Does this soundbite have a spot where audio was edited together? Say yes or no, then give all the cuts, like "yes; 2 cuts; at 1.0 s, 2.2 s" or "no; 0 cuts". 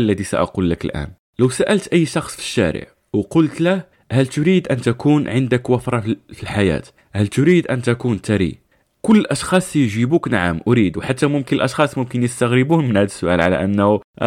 no; 0 cuts